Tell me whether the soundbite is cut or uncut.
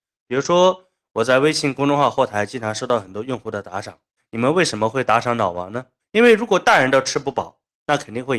cut